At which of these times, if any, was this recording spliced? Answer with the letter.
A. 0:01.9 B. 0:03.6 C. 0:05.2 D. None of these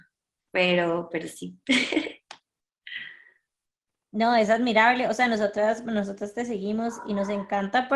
D